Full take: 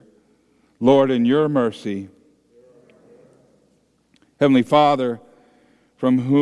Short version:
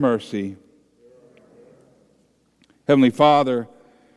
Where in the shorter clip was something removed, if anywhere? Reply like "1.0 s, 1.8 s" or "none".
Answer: none